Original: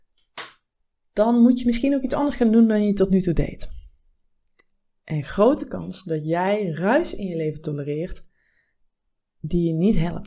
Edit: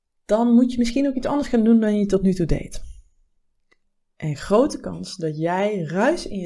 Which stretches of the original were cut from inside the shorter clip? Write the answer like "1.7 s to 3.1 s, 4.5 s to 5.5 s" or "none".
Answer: none

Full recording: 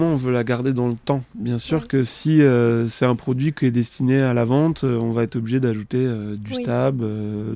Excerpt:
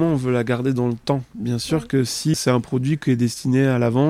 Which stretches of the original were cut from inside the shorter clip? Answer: 2.3 s to 2.9 s

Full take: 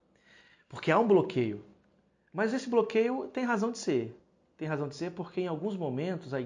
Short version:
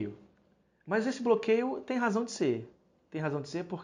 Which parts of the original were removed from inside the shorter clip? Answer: none

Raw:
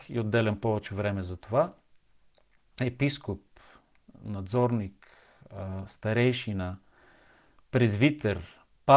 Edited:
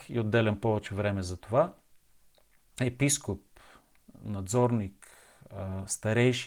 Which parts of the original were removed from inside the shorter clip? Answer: none

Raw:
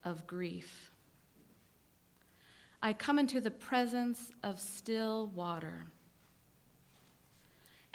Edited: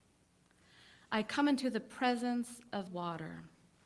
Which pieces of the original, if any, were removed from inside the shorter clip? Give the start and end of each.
4.6 s to 5.3 s

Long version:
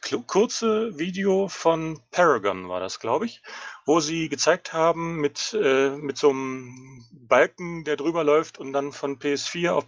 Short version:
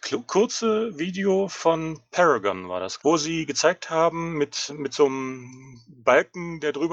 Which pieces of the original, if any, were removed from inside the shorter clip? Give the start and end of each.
3.0 s to 3.8 s, 5.5 s to 5.9 s

